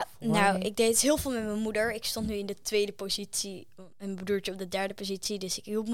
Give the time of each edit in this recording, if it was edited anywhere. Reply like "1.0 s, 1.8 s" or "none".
none